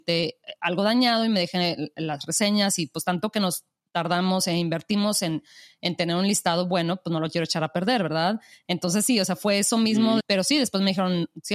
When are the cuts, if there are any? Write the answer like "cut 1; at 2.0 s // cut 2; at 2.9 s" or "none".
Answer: cut 1; at 10.2 s